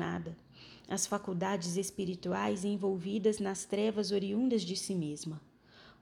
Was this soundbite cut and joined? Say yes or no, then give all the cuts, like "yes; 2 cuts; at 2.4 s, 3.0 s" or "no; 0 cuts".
no; 0 cuts